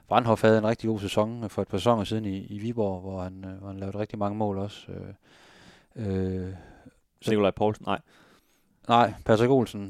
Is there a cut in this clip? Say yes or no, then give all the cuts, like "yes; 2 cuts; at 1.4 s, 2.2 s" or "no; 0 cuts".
no; 0 cuts